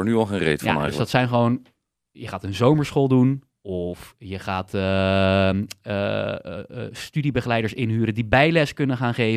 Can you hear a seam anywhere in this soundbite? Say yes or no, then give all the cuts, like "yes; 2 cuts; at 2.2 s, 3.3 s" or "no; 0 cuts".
no; 0 cuts